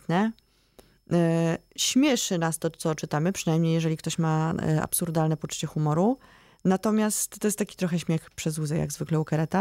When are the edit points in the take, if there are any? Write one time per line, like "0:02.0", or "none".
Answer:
none